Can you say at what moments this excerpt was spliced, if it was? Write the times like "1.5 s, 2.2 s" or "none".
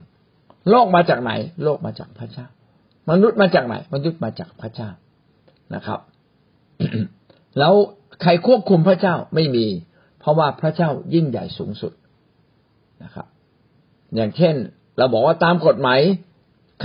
none